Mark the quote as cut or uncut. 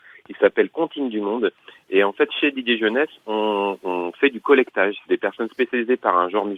cut